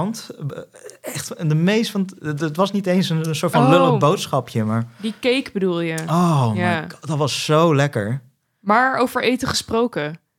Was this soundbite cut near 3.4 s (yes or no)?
no